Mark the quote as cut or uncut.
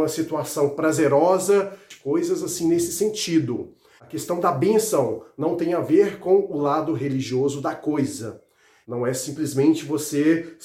cut